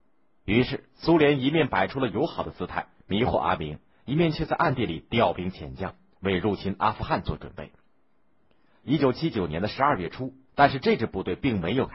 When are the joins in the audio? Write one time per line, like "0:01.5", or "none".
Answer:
0:10.5